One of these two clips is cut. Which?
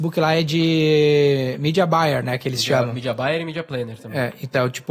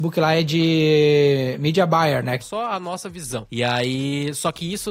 second; 1 cut; at 2.4 s

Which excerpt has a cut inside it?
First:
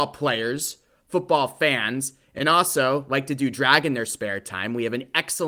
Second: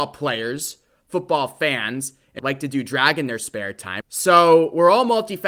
second; 2 cuts; at 2.4 s, 4.0 s

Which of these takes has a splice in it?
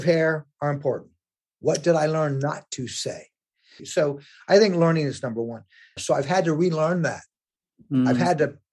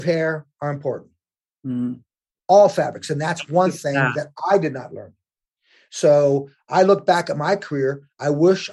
first; 3 cuts; at 1.4 s, 3.8 s, 6.0 s

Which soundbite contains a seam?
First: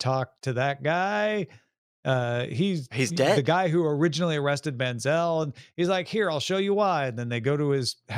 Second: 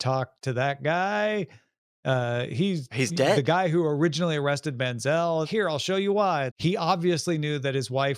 second; 2 cuts; at 5.4 s, 6.5 s

